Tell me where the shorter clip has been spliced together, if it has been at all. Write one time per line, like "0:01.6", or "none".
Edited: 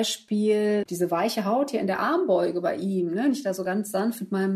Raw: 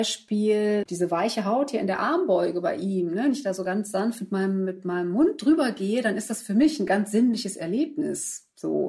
none